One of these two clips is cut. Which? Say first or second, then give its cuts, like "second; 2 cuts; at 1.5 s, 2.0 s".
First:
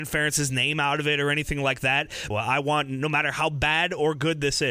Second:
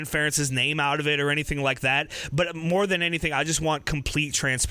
first; 1 cut; at 2.3 s